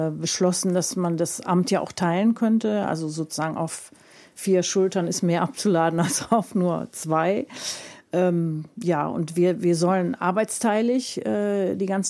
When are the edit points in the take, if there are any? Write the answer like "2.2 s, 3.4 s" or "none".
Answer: none

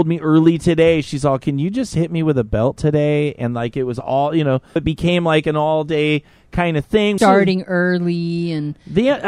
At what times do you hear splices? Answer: 4.8 s, 7.2 s

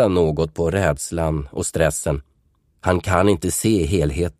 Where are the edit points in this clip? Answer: 2.7 s

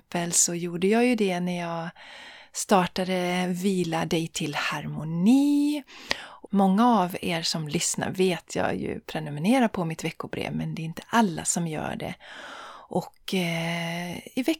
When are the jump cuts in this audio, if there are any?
6.5 s

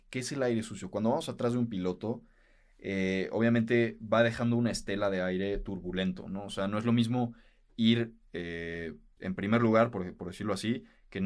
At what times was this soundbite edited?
9.2 s

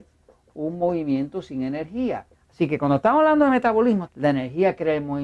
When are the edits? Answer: 2.3 s, 4.1 s

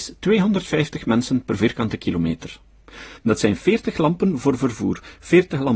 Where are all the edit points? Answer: 3.2 s

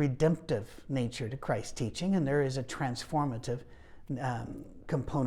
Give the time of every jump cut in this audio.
none

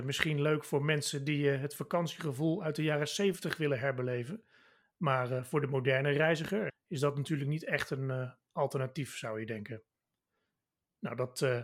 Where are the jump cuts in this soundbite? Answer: 6.7 s

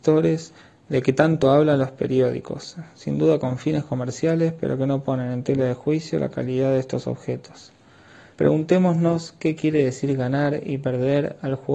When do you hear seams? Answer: 8.3 s

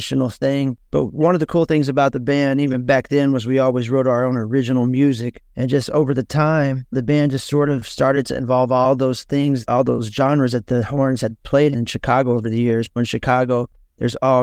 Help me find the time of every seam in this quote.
none

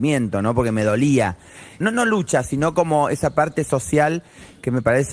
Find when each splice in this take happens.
1.8 s

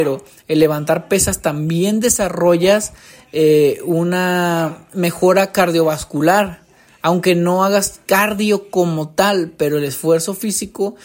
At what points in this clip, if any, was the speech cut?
none

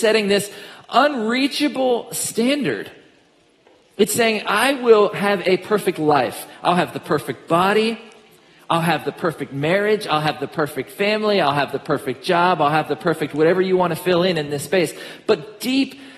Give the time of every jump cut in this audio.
none

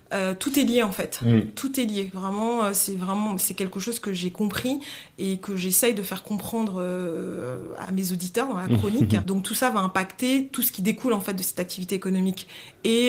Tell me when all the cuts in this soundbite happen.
7.8 s, 9.2 s

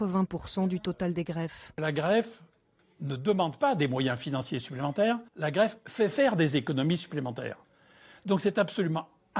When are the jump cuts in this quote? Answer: 5.3 s

